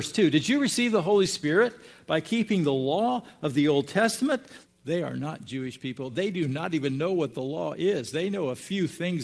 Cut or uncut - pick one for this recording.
cut